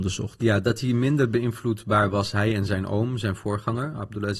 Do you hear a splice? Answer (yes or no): no